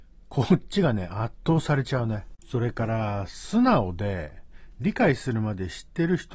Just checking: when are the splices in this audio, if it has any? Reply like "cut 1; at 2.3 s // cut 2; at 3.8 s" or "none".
cut 1; at 2.4 s